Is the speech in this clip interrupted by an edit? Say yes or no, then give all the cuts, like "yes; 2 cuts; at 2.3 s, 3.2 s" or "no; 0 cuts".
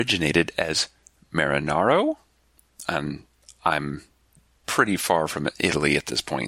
no; 0 cuts